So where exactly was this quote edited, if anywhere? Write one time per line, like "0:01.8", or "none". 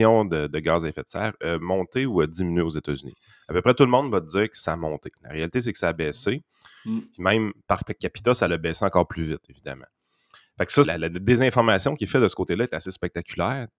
0:10.8